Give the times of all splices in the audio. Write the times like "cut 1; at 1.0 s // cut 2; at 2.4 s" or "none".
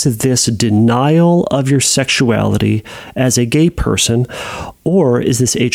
none